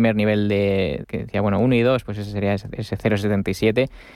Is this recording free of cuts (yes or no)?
no